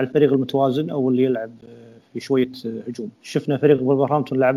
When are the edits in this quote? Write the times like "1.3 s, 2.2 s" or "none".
3.1 s